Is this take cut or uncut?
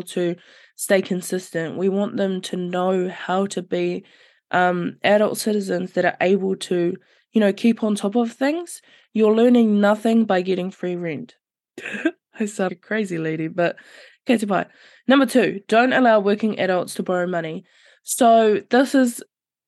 cut